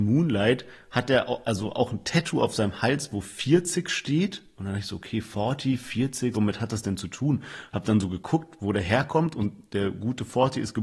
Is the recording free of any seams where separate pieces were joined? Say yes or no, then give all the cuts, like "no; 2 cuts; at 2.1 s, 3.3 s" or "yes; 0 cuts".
no; 1 cut; at 6.3 s